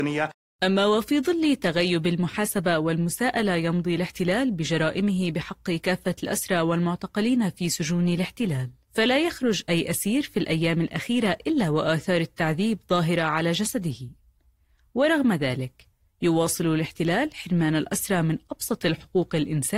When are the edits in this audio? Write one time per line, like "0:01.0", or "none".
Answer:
none